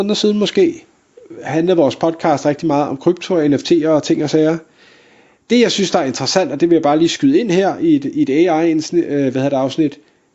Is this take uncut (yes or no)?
yes